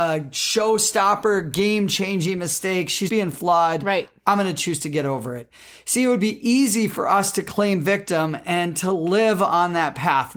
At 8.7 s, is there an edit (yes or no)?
no